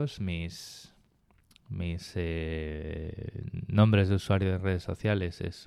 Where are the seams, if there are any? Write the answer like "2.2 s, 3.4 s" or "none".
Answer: none